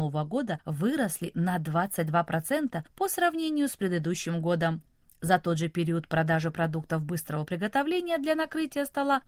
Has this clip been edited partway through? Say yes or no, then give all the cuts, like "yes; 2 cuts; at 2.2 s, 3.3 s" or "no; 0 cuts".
no; 0 cuts